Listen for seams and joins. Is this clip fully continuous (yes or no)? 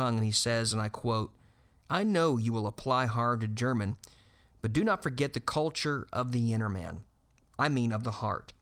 yes